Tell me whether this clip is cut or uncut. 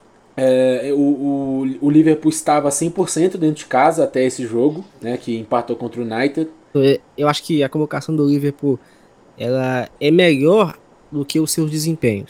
cut